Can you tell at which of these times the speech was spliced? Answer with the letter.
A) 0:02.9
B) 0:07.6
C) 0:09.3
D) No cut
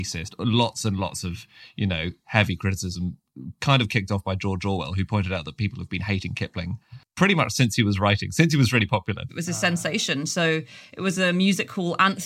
C